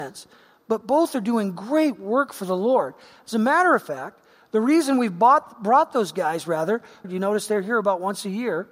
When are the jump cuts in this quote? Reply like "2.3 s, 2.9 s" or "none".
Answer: 7.0 s